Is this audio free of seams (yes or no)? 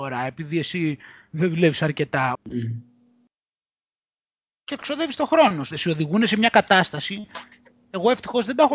no